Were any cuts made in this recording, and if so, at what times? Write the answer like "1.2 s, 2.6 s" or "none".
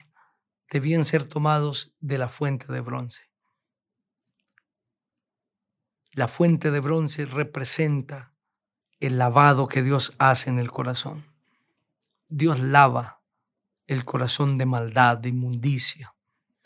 none